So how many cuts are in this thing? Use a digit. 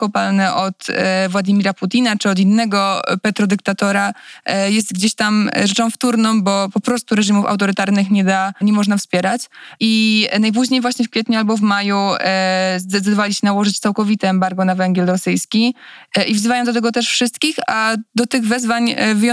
2